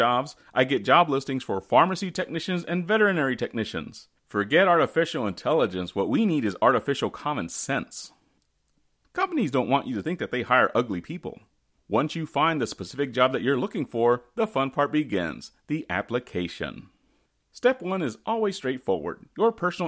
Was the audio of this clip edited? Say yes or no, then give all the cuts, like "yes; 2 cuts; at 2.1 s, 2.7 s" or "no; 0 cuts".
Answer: yes; 3 cuts; at 4.2 s, 9.0 s, 11.8 s